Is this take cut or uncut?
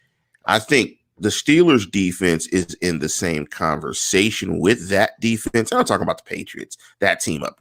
uncut